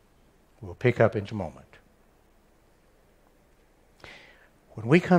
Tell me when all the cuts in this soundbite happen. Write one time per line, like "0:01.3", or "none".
0:01.3

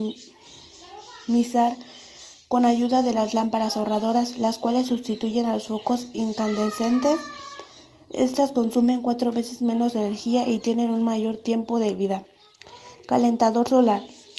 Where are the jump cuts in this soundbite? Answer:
none

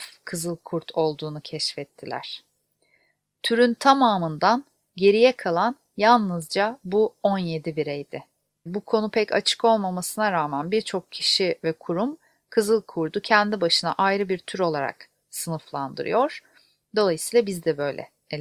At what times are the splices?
0:08.7

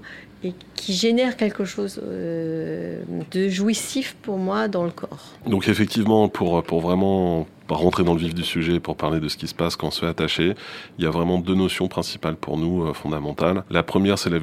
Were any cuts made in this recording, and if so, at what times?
none

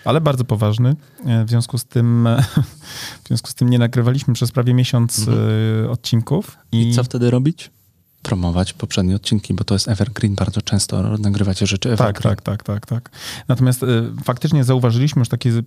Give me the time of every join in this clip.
none

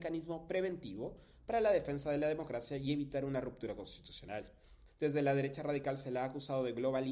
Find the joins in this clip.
0:04.9

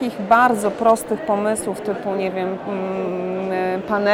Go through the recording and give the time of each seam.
none

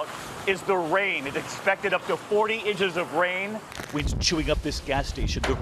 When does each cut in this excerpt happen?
0:03.9

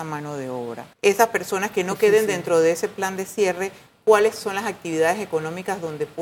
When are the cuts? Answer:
0:00.9

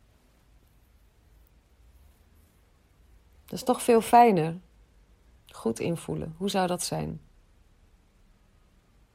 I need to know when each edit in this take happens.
0:05.3

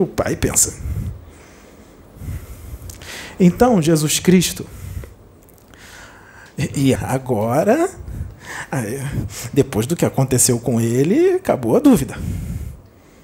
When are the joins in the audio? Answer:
0:07.0

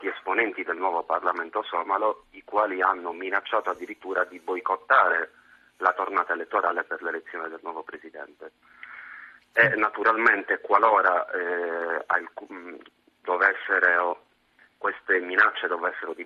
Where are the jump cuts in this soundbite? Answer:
none

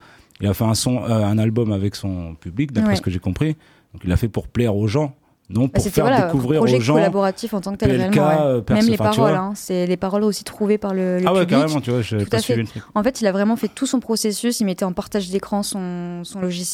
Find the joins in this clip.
none

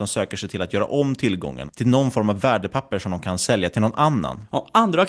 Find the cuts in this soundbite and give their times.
0:01.7

